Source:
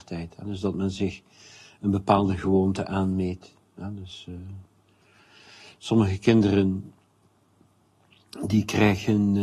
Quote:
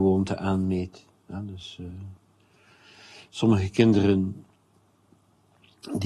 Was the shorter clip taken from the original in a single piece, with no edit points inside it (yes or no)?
yes